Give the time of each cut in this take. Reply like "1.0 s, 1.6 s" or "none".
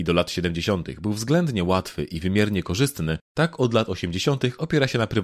none